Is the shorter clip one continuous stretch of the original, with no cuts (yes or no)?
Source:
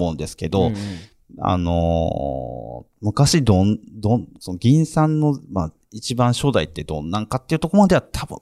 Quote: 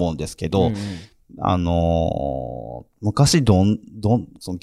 yes